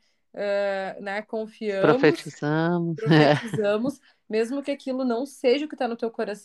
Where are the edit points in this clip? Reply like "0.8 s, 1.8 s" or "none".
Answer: none